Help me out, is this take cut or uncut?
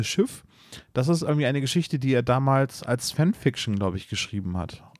uncut